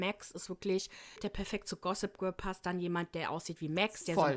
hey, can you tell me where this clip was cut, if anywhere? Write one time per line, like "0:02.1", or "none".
0:01.2